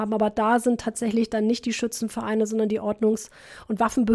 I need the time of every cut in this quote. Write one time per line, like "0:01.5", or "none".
none